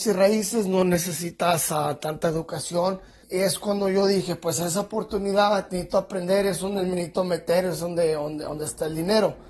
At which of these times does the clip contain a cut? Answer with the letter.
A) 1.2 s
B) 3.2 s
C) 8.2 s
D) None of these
B